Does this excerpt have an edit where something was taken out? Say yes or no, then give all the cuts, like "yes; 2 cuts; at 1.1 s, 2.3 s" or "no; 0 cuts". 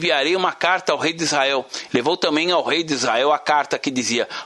yes; 1 cut; at 1.9 s